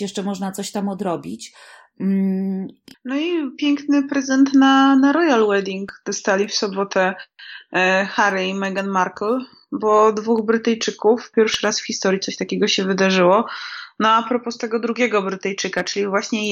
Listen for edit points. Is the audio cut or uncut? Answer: cut